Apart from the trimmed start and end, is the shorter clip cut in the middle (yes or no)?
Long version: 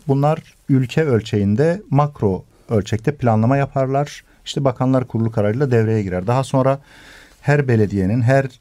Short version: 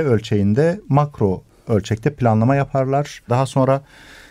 yes